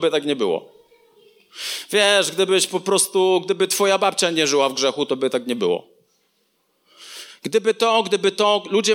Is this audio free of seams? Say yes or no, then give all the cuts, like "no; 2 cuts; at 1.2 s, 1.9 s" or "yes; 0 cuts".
yes; 0 cuts